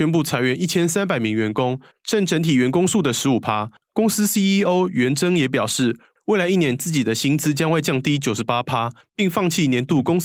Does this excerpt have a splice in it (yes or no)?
no